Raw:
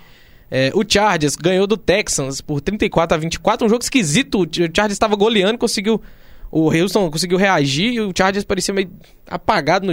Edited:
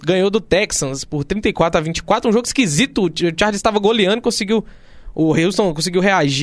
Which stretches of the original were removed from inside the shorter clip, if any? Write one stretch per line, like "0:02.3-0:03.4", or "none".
none

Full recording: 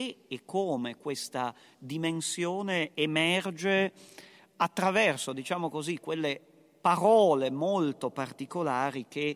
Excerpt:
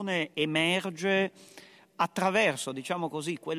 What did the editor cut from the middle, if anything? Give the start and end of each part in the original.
none

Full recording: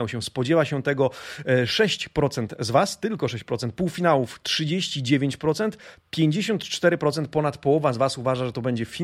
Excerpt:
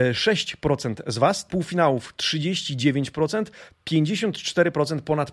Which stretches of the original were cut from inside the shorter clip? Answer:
0:03.0-0:03.7

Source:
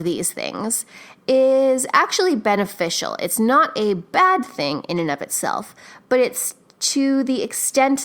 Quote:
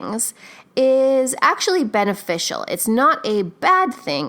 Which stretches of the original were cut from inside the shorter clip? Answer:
none

